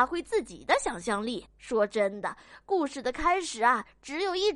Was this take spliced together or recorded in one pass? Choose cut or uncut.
cut